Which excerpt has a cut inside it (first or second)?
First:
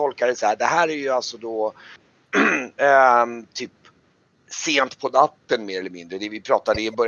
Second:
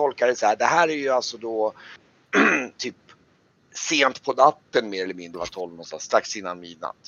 second